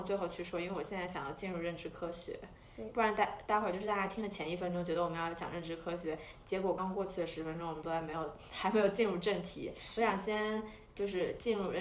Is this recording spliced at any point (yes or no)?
yes